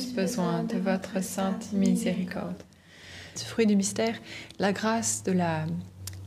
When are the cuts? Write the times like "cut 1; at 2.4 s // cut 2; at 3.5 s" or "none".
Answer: cut 1; at 3.4 s